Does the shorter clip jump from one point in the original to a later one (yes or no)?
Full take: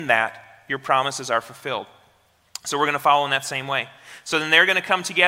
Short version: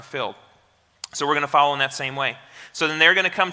no